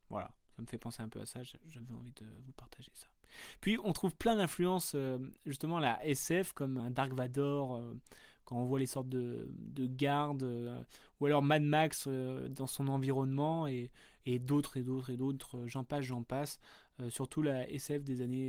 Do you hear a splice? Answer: yes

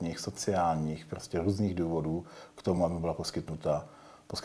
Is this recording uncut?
yes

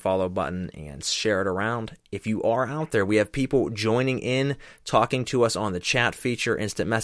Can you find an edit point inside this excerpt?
no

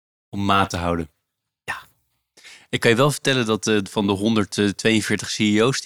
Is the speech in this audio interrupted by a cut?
no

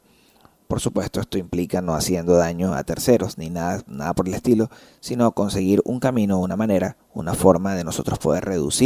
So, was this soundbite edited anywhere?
no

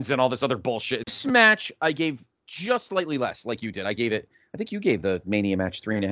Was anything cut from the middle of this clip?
yes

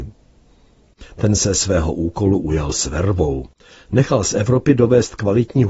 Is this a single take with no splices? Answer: yes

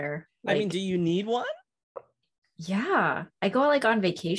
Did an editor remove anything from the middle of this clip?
no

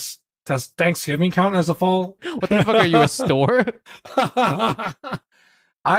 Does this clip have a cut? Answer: yes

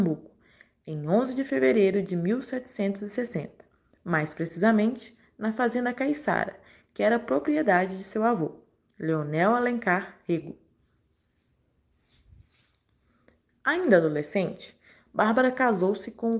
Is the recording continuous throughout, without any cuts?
yes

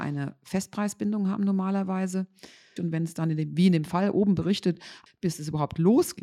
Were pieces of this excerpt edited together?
yes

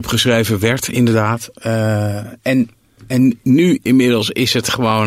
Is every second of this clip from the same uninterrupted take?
yes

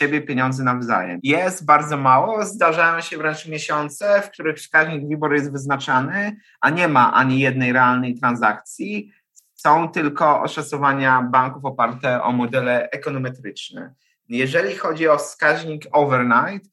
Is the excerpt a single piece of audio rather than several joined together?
no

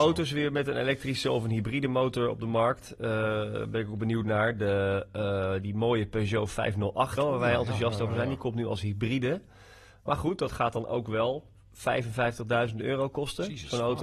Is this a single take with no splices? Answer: no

